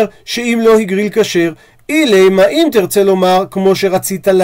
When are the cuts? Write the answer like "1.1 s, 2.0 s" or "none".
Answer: none